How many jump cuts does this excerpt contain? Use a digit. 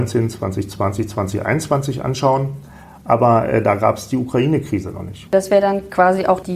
1